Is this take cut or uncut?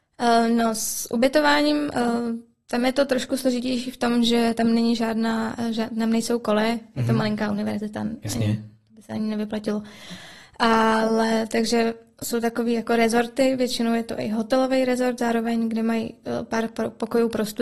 uncut